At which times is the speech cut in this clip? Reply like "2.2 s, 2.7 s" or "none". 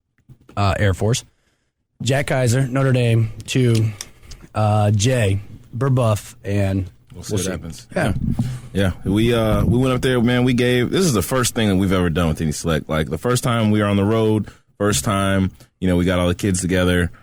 none